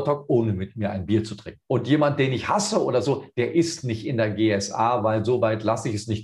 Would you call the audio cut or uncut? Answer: cut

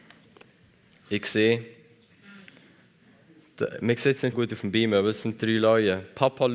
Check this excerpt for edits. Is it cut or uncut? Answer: cut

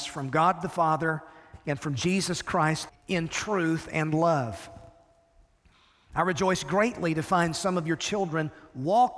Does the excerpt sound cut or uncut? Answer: cut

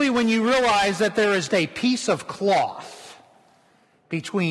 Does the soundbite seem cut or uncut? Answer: cut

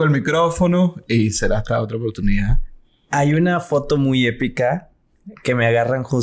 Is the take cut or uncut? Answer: uncut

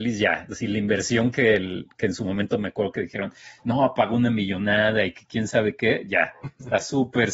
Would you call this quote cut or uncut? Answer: uncut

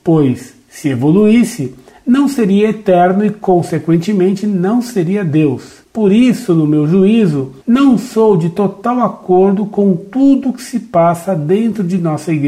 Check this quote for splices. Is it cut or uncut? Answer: uncut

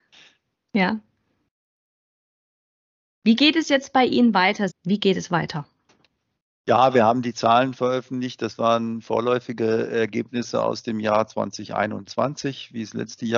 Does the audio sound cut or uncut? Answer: cut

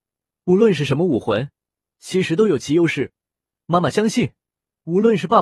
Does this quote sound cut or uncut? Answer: uncut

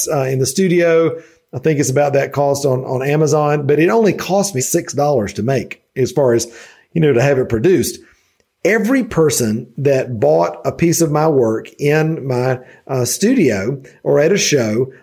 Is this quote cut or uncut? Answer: cut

